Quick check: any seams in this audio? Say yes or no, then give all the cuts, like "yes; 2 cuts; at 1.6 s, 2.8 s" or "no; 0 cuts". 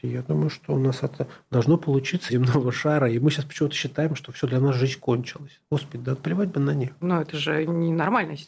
yes; 2 cuts; at 2.3 s, 7.0 s